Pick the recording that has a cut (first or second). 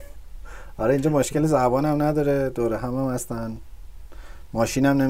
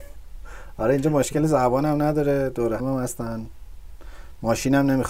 second